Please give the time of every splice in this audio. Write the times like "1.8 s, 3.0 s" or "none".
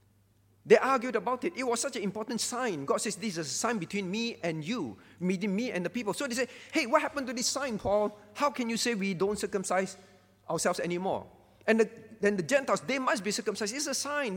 none